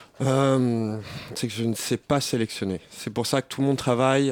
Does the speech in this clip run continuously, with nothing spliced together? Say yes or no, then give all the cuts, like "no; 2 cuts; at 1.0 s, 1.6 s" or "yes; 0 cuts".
no; 1 cut; at 1.4 s